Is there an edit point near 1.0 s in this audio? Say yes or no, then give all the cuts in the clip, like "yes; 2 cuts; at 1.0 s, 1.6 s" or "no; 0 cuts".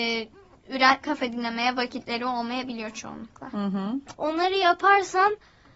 yes; 2 cuts; at 1.0 s, 4.1 s